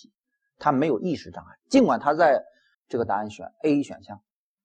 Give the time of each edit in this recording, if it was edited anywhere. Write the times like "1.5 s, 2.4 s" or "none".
2.7 s